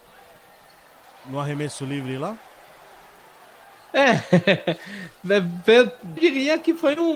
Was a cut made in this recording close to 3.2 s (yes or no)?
no